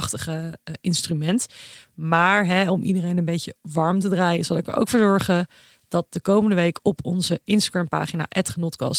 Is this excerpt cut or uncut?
uncut